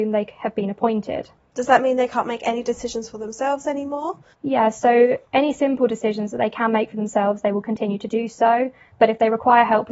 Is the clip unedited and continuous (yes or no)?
no